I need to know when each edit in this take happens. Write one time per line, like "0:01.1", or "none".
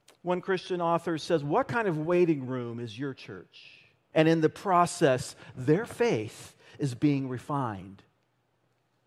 0:04.1